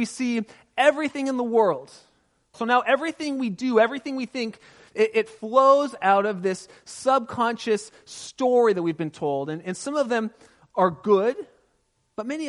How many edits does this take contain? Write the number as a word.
one